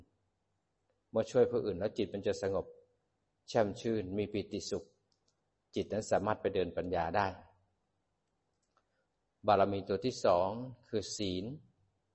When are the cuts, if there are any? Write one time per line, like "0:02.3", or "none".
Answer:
none